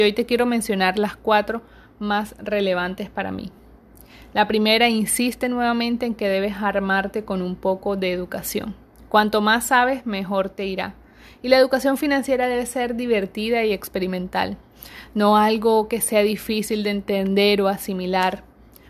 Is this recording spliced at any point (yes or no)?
no